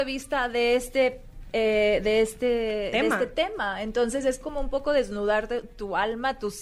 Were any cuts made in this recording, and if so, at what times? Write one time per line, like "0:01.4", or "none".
none